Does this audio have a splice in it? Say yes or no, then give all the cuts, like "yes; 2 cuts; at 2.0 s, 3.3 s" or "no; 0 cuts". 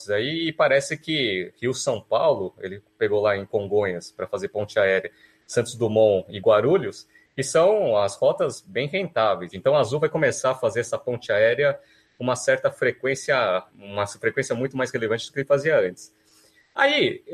yes; 2 cuts; at 9.5 s, 13.7 s